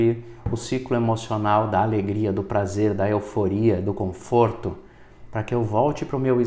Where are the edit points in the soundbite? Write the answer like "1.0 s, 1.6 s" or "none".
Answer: 5.3 s

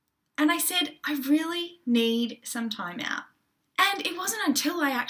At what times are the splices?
3.6 s

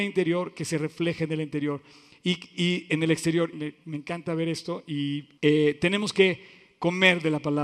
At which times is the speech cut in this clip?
3.5 s, 5.4 s

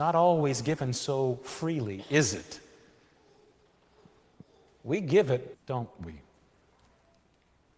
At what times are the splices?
5.5 s

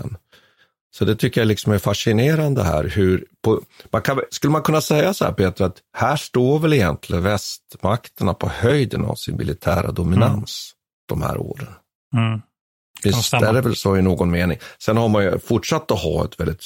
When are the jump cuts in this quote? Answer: none

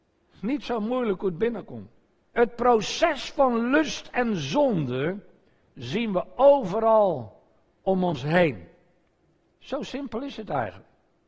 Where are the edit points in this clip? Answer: 2.3 s, 9.6 s

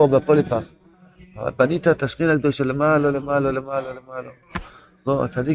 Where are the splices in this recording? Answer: 3.1 s

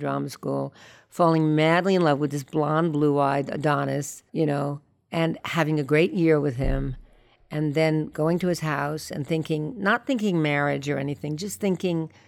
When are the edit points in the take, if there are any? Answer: 4.3 s

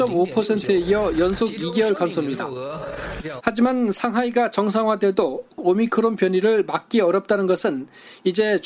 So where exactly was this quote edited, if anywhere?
3.4 s

